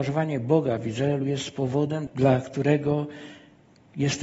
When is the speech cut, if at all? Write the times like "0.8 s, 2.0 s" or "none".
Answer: 2.1 s